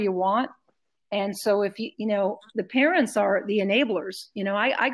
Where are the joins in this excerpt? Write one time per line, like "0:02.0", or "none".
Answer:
0:01.9